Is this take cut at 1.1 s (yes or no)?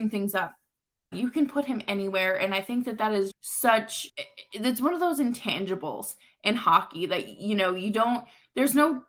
yes